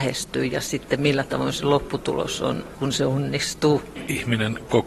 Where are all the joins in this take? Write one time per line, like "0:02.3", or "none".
0:02.7